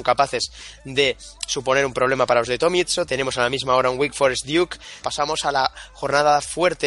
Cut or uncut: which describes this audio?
cut